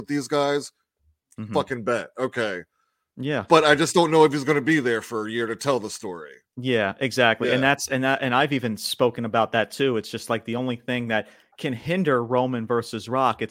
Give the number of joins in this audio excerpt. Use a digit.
0